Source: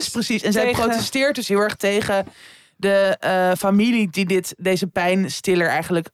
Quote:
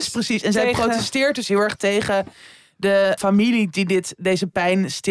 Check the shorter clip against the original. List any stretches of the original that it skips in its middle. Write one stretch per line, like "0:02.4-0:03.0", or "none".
0:03.2-0:03.6